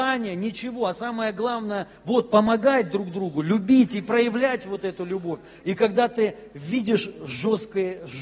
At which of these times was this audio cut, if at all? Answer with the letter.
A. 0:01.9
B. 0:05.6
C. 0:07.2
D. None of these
B